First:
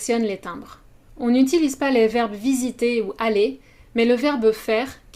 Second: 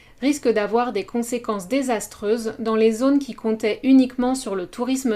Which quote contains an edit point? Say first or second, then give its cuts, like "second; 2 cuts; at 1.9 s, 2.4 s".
first; 1 cut; at 1.1 s